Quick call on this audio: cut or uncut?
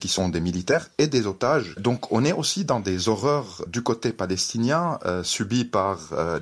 cut